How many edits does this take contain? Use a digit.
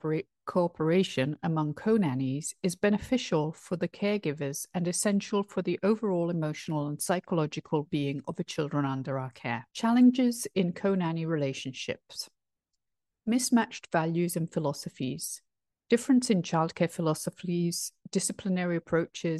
2